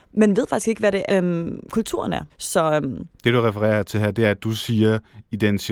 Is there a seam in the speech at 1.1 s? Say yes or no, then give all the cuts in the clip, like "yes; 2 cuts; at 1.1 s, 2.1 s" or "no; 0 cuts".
yes; 2 cuts; at 1.1 s, 2.3 s